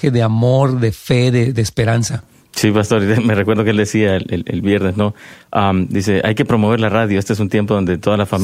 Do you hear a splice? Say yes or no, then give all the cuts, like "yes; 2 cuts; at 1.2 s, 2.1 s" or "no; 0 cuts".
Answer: no; 0 cuts